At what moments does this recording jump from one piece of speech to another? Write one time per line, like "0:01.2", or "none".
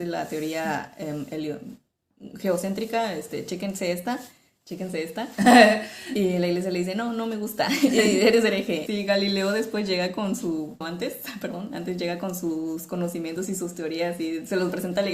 0:08.9
0:10.8